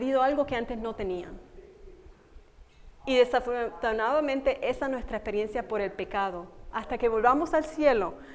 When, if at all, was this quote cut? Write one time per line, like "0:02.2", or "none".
0:06.7

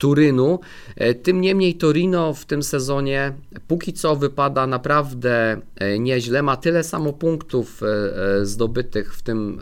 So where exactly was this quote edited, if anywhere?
none

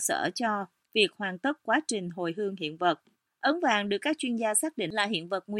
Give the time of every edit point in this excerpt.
0:03.3

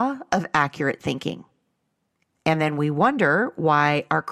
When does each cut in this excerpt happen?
0:02.3

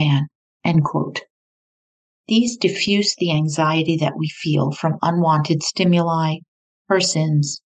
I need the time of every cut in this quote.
0:02.1

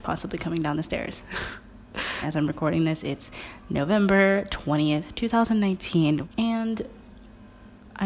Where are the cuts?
0:02.2
0:06.2

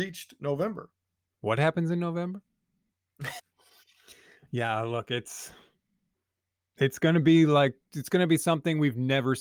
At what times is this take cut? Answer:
0:03.4

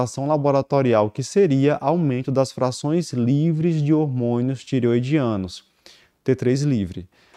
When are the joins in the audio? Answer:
0:06.2

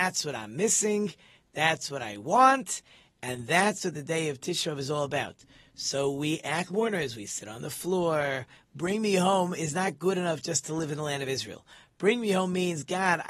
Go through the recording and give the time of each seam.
0:06.7
0:08.6

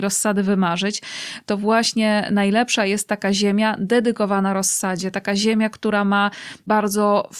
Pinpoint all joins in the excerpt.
none

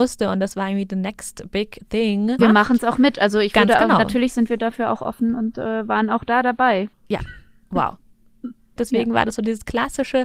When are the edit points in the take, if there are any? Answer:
0:02.4
0:06.9
0:08.8

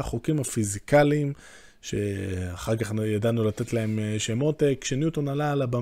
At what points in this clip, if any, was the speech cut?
none

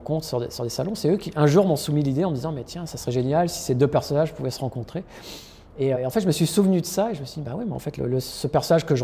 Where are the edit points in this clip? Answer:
0:06.0

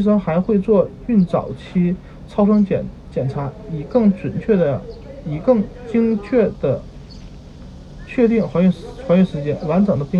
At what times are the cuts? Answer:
none

